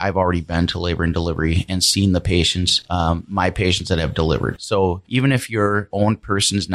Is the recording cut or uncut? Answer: uncut